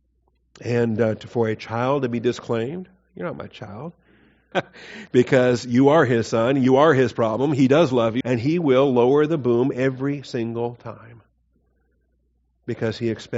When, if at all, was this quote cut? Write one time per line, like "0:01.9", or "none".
0:04.5
0:08.2